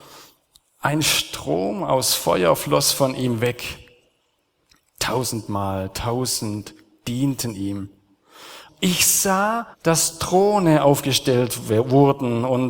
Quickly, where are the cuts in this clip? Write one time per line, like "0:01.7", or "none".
0:08.7
0:09.7